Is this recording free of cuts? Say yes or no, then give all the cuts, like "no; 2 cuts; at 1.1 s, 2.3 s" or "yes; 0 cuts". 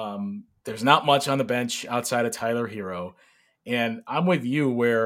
yes; 0 cuts